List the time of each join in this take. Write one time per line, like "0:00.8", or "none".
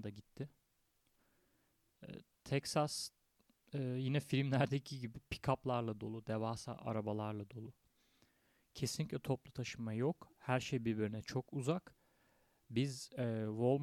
none